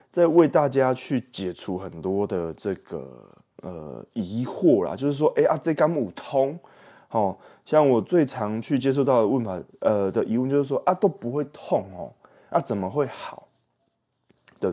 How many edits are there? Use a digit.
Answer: 0